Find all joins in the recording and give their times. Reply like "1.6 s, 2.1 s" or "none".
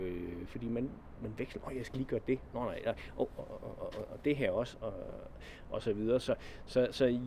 none